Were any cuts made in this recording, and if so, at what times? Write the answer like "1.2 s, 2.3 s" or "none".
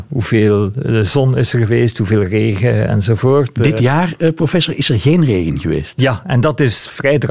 none